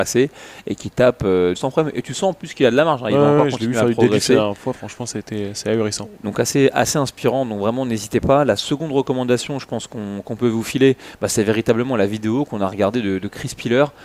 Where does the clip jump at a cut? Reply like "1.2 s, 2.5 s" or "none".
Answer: 1.5 s